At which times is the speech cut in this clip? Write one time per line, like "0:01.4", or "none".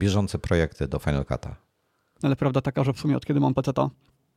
0:02.2